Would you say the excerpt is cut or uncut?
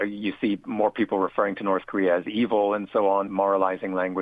cut